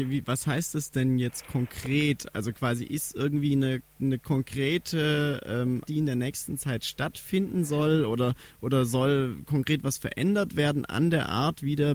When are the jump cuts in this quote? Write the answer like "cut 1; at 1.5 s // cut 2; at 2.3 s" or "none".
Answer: cut 1; at 5.9 s